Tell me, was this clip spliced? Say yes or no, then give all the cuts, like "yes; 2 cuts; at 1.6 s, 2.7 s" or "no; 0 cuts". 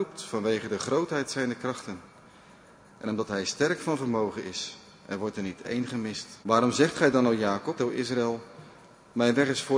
yes; 2 cuts; at 6.4 s, 7.8 s